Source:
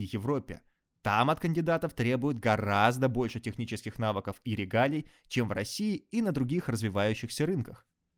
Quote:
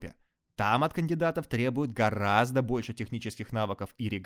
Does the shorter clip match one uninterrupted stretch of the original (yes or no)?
yes